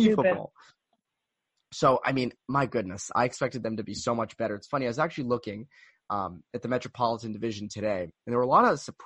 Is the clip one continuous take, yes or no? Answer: yes